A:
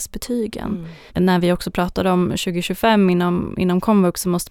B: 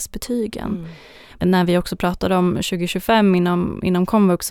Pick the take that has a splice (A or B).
A